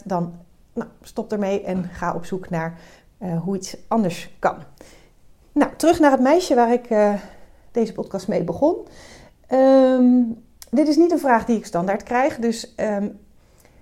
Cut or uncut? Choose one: uncut